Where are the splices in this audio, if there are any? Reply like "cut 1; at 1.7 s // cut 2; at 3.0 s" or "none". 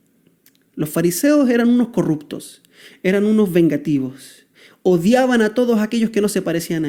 none